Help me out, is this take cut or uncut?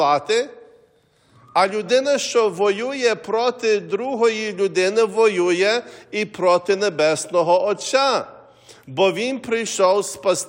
uncut